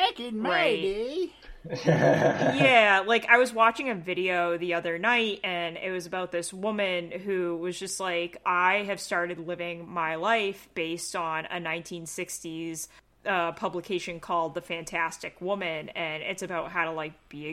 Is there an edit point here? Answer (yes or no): yes